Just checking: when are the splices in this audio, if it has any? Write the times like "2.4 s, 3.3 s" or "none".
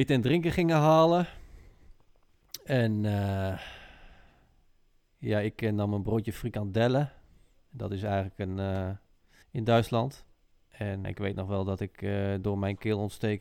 9.4 s, 11.0 s